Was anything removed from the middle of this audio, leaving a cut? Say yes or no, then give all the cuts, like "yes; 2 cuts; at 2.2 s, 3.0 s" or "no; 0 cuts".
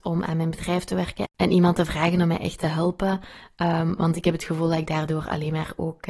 no; 0 cuts